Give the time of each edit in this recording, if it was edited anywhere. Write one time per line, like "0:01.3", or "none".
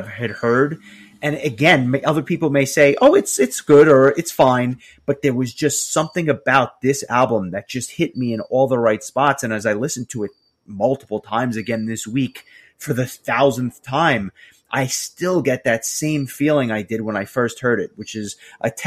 none